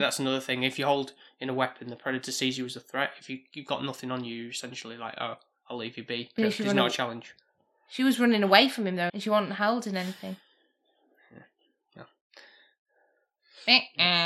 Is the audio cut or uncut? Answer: cut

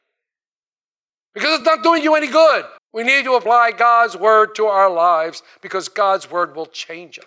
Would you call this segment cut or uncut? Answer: cut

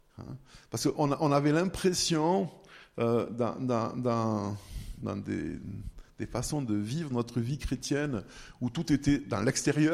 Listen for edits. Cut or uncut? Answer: uncut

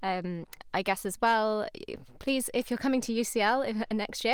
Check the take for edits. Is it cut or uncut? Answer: uncut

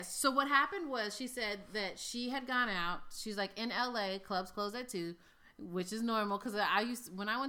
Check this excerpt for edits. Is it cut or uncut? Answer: uncut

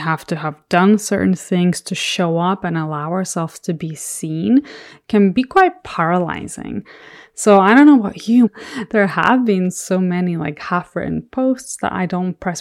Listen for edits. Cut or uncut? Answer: cut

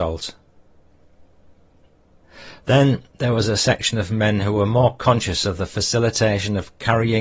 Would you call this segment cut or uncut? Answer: cut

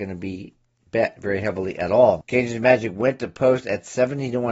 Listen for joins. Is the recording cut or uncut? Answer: cut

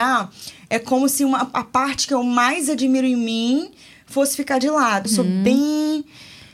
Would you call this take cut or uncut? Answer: cut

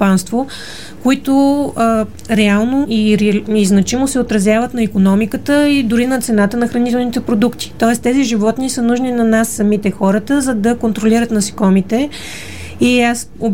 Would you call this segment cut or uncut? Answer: cut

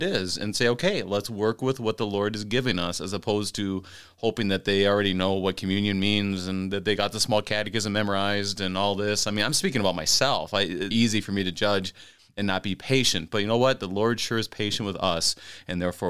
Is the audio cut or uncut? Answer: cut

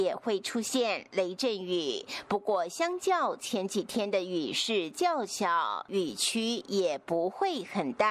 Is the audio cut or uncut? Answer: uncut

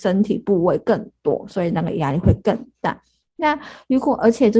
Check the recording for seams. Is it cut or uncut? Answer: cut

